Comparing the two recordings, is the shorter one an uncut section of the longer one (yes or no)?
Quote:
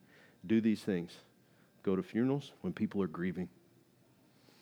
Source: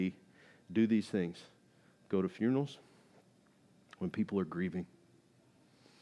no